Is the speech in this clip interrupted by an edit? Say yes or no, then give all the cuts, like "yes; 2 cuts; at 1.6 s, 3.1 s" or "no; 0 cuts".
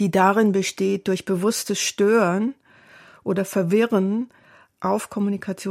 no; 0 cuts